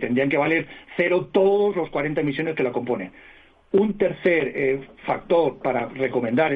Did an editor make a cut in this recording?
no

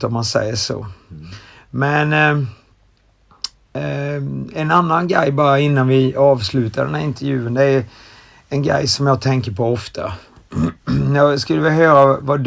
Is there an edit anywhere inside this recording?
no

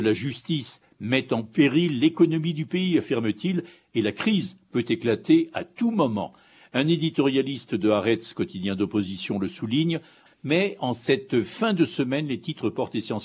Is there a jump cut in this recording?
yes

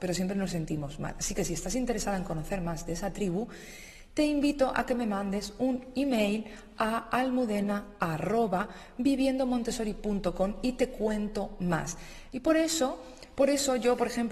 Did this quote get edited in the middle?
yes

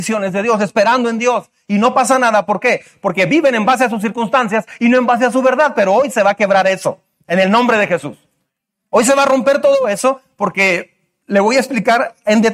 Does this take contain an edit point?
no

